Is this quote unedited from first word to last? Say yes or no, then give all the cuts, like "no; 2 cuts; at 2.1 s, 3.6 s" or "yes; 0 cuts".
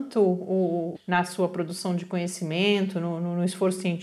no; 1 cut; at 0.9 s